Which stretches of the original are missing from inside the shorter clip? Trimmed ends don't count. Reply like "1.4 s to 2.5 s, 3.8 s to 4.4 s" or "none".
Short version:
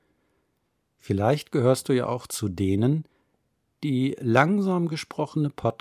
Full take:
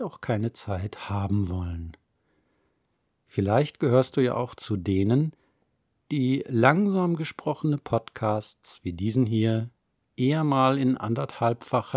none